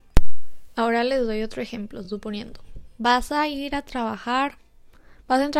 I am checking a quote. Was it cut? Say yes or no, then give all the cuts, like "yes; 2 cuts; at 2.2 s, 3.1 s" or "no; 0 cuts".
no; 0 cuts